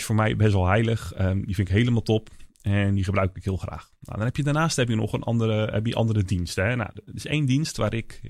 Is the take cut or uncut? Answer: uncut